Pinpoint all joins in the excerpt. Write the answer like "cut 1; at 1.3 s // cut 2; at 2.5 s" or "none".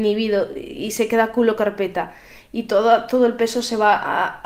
none